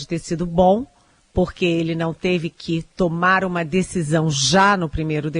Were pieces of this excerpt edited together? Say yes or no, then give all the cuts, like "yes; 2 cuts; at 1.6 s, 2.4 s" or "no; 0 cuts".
no; 0 cuts